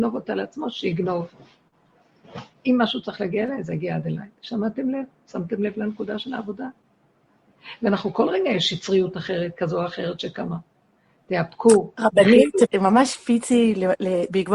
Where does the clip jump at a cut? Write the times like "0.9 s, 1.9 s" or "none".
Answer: 12.6 s